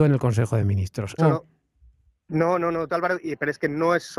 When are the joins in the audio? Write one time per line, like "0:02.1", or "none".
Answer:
0:01.2
0:02.9